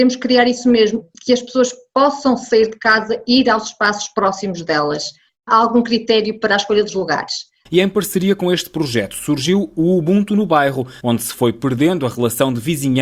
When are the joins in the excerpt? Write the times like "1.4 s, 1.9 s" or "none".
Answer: 5.3 s, 7.7 s, 11.0 s